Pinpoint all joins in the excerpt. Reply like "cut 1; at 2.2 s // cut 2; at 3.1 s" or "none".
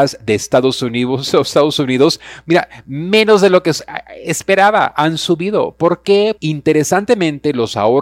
cut 1; at 6.4 s